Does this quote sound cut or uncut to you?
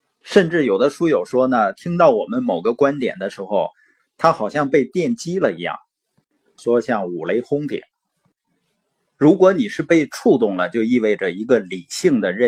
cut